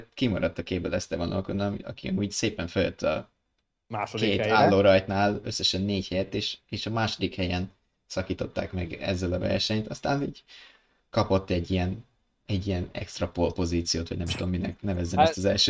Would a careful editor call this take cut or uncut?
uncut